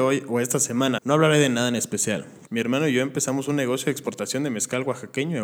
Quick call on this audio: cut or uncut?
cut